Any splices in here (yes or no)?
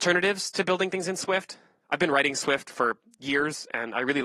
no